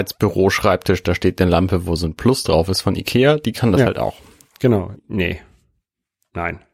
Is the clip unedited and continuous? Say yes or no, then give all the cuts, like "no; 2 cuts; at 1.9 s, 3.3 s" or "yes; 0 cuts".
no; 1 cut; at 5.0 s